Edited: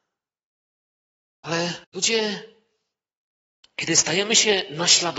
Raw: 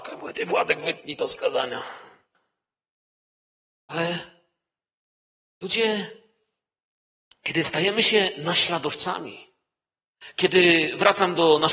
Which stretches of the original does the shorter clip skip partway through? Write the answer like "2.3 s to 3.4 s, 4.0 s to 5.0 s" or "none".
4.3 s to 5.5 s